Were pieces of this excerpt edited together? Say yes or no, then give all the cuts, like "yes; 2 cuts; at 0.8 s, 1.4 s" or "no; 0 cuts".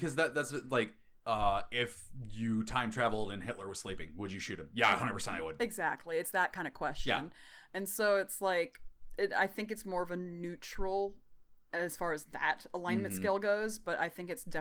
no; 0 cuts